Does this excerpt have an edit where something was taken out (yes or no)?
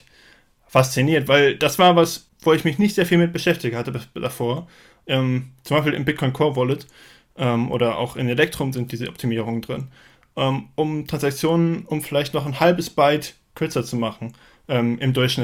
yes